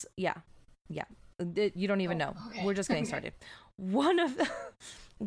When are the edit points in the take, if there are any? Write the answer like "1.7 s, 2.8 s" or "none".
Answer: none